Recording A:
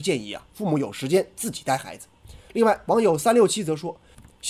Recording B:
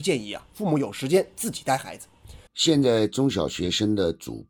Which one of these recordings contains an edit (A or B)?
B